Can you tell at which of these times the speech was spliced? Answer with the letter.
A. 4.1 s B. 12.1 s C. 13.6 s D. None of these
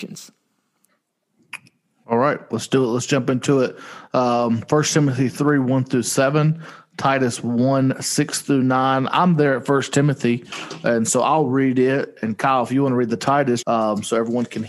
C